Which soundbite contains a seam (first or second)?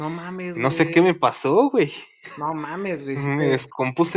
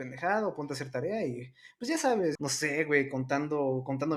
second